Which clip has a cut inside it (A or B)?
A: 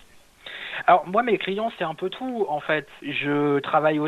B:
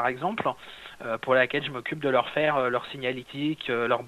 A